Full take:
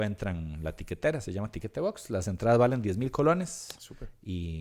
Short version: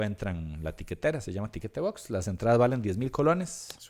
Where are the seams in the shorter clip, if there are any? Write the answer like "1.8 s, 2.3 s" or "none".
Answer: none